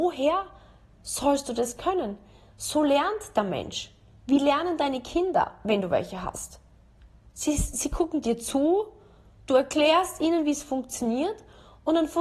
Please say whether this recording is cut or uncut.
uncut